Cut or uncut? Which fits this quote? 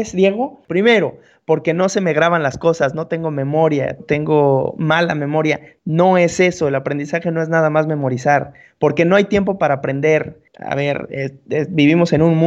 cut